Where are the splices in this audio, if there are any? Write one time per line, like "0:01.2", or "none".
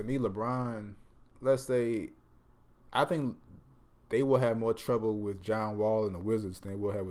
0:01.3